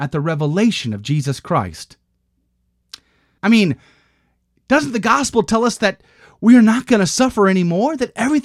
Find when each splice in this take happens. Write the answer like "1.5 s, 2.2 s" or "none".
3.4 s